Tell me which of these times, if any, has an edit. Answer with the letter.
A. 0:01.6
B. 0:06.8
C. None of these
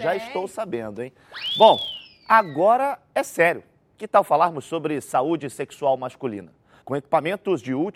B